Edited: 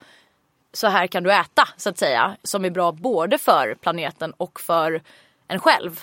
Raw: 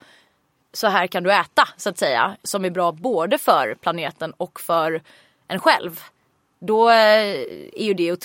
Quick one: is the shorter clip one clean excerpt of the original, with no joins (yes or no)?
yes